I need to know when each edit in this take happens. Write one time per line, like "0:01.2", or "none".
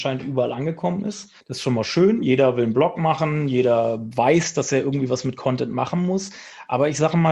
0:01.4